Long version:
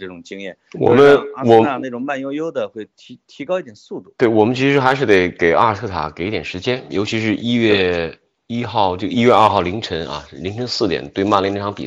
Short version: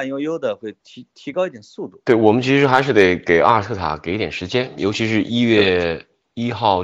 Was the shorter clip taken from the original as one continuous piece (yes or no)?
yes